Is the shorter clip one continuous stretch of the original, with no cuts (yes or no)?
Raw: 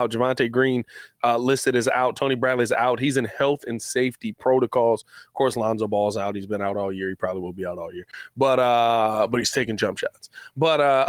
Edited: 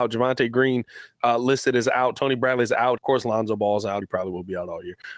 no